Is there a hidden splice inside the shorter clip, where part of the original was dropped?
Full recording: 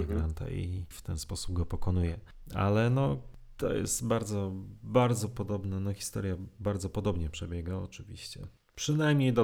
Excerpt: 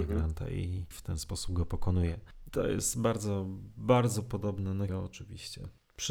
yes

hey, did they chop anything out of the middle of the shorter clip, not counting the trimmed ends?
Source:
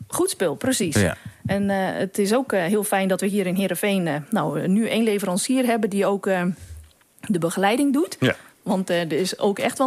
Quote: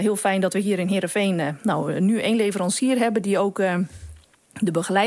no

